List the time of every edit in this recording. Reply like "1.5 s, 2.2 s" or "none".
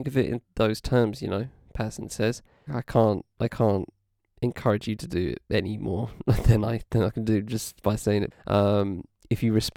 2.7 s, 8.3 s